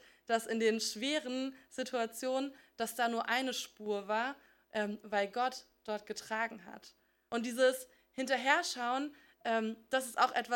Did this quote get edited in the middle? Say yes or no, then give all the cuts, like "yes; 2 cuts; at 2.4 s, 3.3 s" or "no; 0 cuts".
yes; 1 cut; at 7.3 s